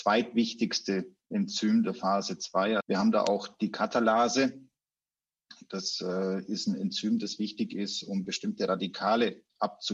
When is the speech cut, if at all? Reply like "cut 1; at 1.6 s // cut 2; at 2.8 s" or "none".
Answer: cut 1; at 2.8 s